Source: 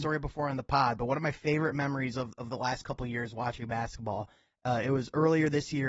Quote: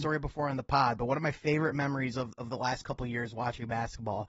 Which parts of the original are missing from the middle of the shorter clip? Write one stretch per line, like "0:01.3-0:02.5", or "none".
none